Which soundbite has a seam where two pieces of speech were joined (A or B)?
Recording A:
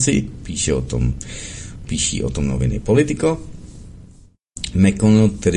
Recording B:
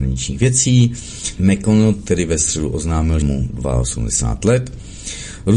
B